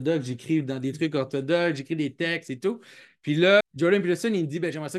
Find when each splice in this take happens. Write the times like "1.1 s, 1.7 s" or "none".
3.6 s